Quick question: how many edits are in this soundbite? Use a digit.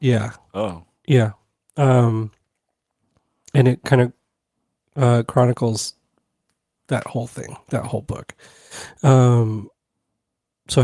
0